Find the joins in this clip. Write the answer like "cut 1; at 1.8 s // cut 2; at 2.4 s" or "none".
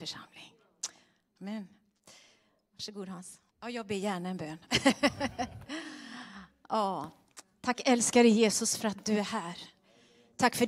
cut 1; at 1.4 s // cut 2; at 3.5 s

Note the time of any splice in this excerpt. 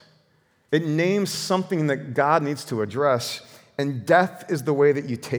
none

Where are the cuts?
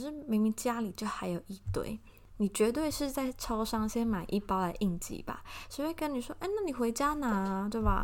none

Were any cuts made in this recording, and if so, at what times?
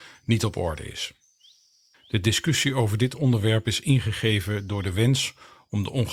cut 1; at 1.9 s

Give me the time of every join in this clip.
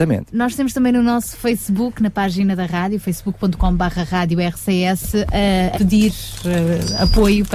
cut 1; at 5.7 s

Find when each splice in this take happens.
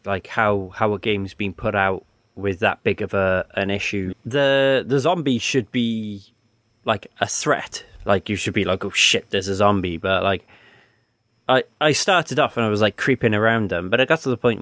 cut 1; at 4.1 s

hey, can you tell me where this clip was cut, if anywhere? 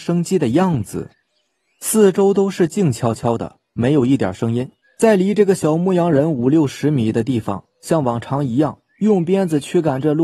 cut 1; at 4.8 s // cut 2; at 7.7 s

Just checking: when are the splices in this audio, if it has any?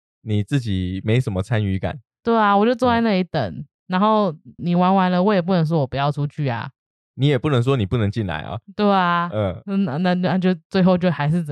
cut 1; at 4.6 s

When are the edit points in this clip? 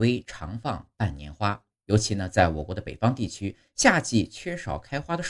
cut 1; at 1.7 s

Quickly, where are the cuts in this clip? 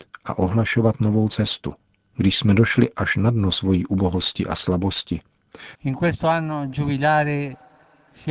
cut 1; at 5.7 s

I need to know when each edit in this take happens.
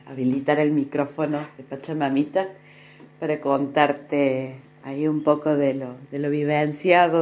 none

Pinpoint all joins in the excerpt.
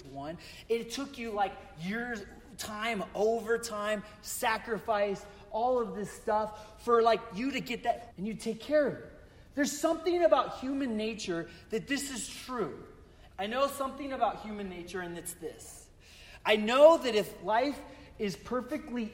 cut 1; at 8.1 s // cut 2; at 13.3 s

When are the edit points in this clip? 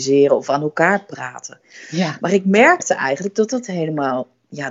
none

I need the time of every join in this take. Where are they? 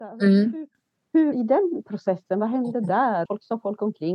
cut 1; at 1.3 s // cut 2; at 3.3 s

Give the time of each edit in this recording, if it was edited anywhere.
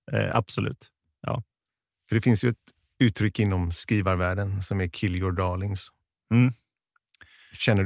none

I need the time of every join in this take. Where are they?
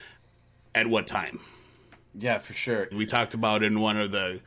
cut 1; at 2.9 s

